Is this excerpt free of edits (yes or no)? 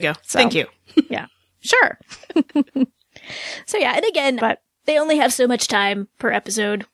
no